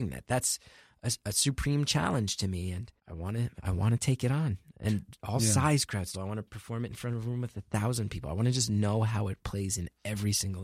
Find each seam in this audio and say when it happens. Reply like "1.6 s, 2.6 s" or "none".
3.0 s, 6.1 s